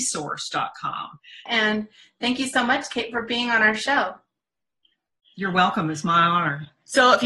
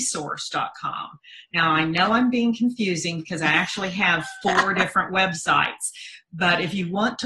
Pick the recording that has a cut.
first; 1 cut; at 1.5 s

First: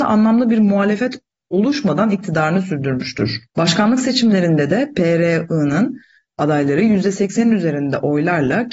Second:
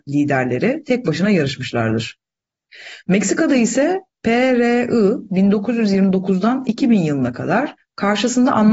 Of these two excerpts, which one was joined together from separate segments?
first; 1 cut; at 3.5 s

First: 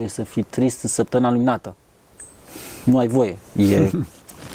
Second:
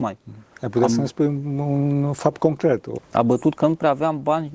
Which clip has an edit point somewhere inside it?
second; 1 cut; at 3.0 s

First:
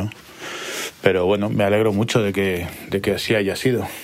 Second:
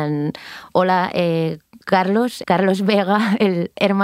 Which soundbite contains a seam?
second; 1 cut; at 2.4 s

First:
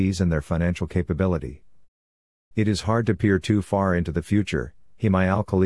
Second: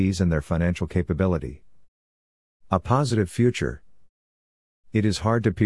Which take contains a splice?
first; 1 cut; at 2.5 s

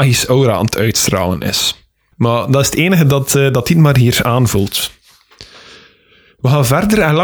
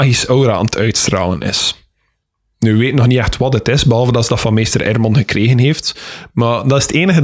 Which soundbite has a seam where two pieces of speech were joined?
first; 1 cut; at 2.1 s

